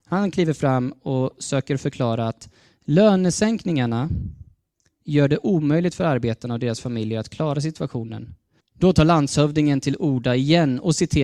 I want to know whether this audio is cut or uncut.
cut